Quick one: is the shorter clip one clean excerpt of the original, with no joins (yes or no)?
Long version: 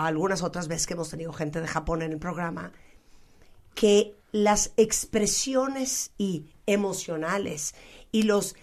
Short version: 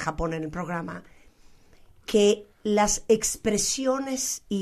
yes